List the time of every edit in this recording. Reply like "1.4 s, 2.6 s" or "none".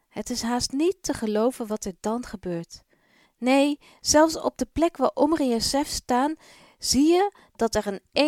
3.2 s